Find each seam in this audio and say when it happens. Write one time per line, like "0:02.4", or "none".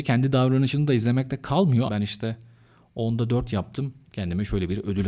0:01.9
0:04.1